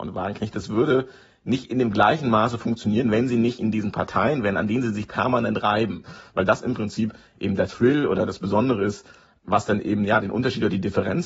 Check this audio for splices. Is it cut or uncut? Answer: uncut